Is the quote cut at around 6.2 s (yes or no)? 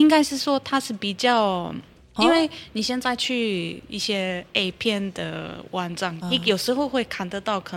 yes